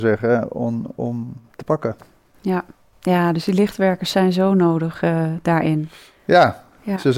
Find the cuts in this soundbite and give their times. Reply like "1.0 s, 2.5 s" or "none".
none